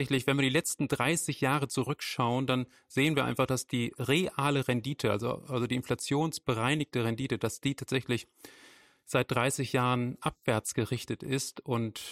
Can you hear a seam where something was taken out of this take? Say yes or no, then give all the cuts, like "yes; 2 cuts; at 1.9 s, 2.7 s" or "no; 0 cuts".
no; 0 cuts